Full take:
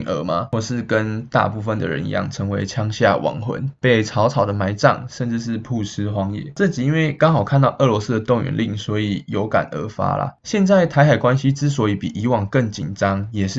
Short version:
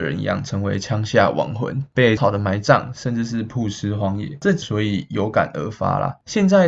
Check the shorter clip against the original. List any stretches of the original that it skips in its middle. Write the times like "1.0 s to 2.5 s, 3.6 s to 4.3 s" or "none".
4.0 s to 4.3 s, 6.8 s to 8.8 s